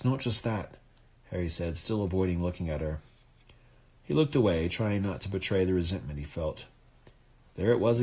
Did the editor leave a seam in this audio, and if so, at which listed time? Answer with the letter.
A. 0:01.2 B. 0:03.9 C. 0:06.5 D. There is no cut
B